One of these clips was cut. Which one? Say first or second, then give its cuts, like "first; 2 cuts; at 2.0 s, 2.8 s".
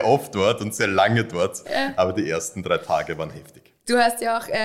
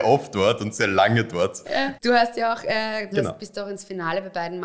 second; 2 cuts; at 2.0 s, 3.1 s